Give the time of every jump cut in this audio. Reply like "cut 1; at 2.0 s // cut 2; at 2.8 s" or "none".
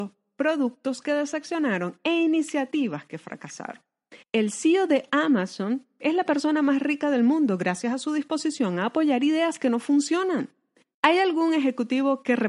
cut 1; at 4.2 s // cut 2; at 10.9 s